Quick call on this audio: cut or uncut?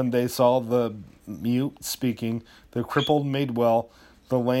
uncut